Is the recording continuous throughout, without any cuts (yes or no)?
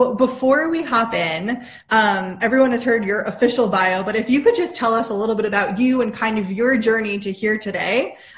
yes